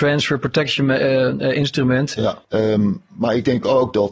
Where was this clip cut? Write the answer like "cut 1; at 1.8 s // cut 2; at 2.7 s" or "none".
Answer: cut 1; at 2.4 s